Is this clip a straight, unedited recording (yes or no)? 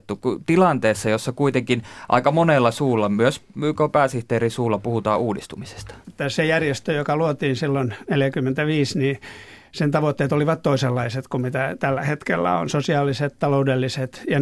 no